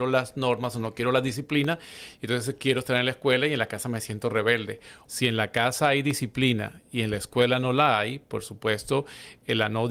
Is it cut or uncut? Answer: cut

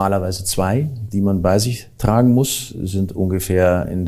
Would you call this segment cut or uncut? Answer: uncut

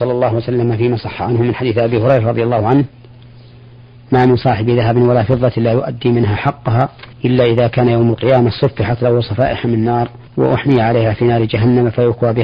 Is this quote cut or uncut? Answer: cut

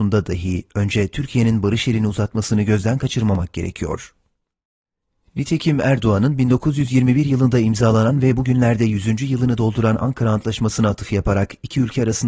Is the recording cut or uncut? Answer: uncut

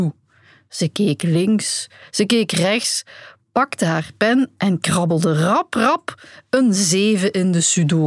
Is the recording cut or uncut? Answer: uncut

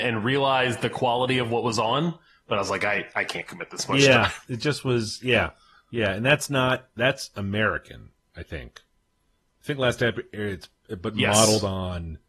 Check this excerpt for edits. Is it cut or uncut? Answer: uncut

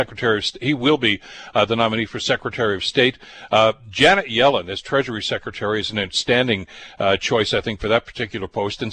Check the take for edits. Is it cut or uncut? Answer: uncut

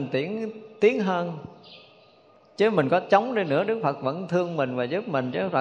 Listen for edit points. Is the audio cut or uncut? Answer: uncut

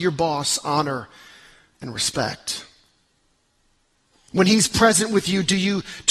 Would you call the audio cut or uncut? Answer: uncut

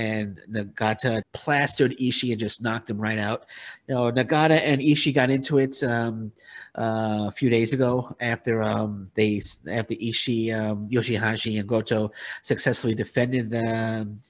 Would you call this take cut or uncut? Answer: cut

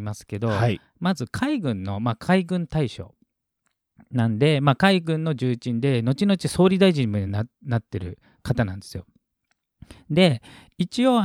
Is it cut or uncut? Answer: uncut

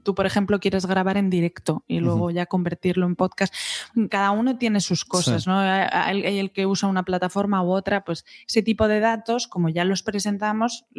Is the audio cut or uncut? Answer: uncut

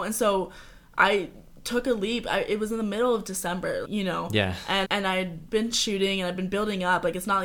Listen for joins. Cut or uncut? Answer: cut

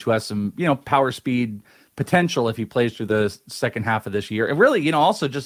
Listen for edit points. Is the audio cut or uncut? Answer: uncut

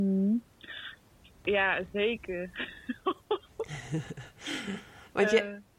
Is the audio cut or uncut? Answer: uncut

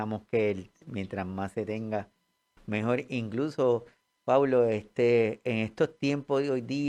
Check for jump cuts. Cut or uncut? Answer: uncut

